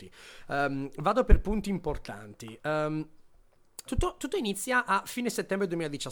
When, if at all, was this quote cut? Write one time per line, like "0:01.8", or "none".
0:03.9